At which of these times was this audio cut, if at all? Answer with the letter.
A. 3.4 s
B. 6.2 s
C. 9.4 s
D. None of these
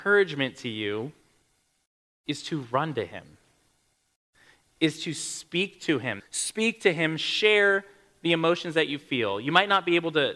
B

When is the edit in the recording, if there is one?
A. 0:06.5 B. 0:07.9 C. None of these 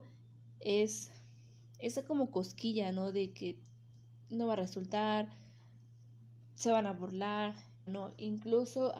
B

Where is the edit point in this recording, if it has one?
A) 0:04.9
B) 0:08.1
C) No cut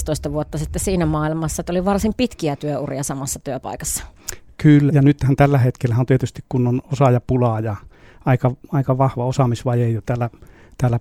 A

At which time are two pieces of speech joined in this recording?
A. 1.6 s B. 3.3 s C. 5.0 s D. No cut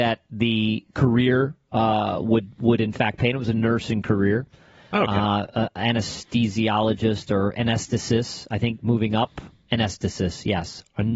D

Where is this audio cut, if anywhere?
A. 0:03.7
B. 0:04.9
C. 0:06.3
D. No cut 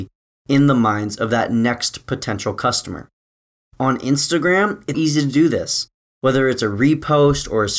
B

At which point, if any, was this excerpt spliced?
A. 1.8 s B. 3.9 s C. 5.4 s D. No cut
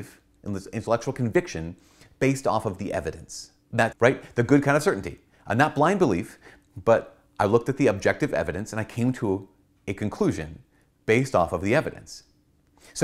B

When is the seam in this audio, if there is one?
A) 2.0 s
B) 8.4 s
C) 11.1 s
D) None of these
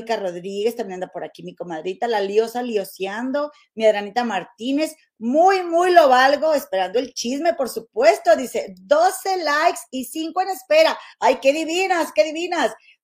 D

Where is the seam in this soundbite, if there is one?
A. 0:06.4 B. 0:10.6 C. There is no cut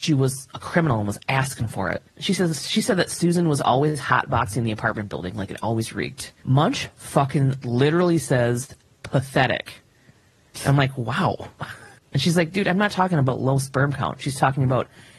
A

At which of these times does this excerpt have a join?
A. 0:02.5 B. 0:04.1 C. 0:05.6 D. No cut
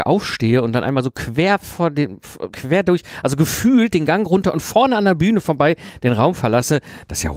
A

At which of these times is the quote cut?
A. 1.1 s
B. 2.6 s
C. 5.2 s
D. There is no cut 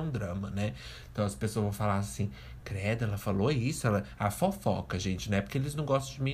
D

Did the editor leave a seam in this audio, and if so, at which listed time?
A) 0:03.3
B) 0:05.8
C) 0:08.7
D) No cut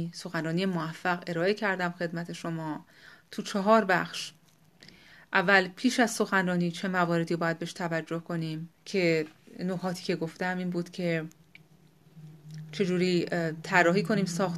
C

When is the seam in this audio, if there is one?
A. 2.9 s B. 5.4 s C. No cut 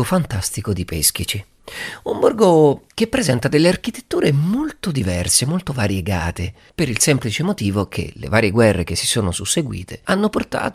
A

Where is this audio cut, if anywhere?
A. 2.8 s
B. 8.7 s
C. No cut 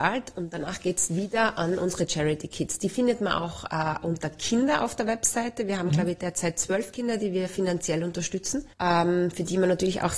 B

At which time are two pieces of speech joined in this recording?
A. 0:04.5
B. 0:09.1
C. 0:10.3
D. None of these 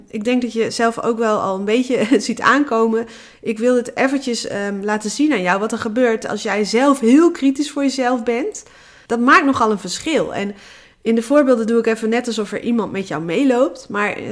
B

